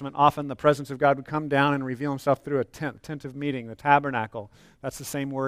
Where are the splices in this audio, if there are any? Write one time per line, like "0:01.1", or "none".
none